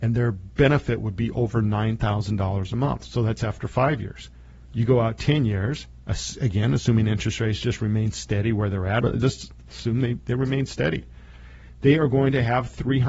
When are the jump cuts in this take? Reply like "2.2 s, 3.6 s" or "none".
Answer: 9.0 s